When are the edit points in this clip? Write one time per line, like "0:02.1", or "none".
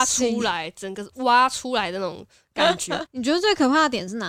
0:03.1